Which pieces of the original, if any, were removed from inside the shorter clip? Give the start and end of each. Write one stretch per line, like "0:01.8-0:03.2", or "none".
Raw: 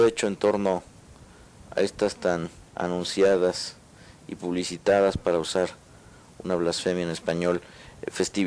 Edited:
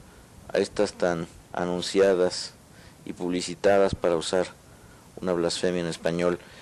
none